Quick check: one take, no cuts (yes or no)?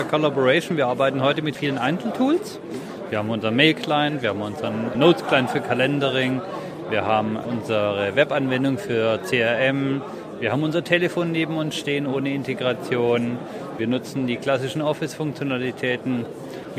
yes